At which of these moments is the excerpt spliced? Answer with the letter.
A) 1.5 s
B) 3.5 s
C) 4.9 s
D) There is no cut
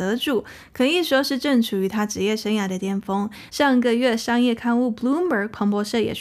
B